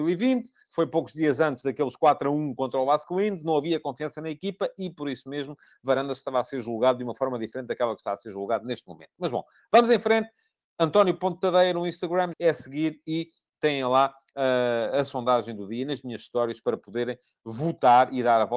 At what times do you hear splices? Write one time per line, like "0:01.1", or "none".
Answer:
0:12.3